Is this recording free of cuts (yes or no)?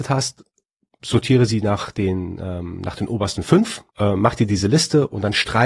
no